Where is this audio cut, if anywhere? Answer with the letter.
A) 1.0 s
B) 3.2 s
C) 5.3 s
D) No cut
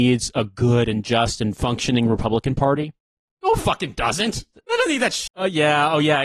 C